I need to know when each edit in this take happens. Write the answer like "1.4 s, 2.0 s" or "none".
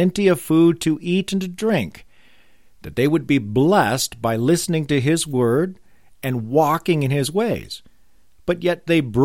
none